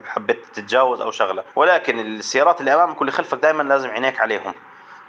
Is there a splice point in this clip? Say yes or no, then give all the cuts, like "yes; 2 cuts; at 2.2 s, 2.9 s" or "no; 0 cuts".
yes; 1 cut; at 1.5 s